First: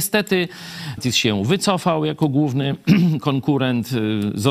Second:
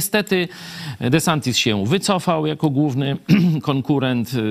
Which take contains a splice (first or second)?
first